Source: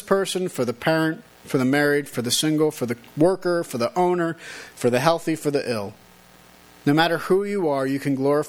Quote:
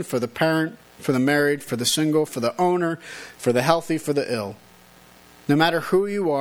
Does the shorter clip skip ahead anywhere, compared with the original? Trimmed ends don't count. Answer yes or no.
yes